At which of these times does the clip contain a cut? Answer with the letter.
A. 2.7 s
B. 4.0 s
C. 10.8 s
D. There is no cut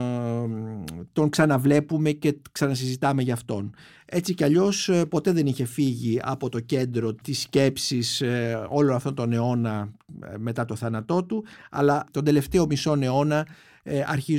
B